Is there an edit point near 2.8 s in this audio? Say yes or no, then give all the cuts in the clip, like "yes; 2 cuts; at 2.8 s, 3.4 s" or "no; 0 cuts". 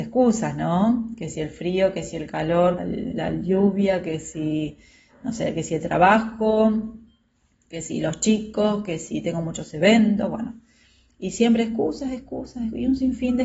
yes; 1 cut; at 2.8 s